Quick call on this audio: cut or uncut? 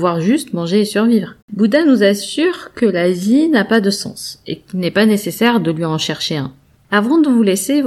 cut